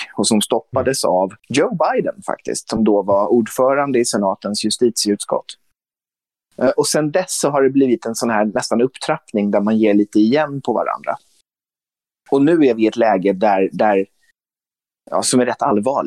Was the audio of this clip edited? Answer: yes; 1 cut; at 1.4 s

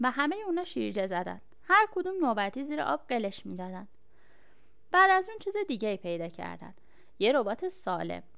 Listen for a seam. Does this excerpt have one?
no; 0 cuts

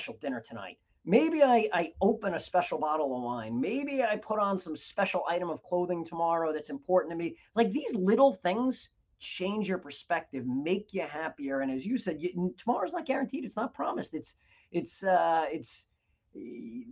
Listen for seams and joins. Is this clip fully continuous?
yes; 0 cuts

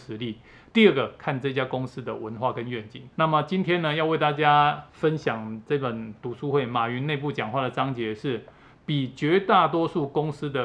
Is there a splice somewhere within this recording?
yes; 2 cuts; at 3.1 s, 4.9 s

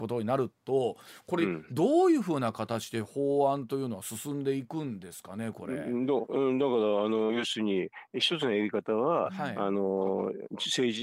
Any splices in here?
no; 0 cuts

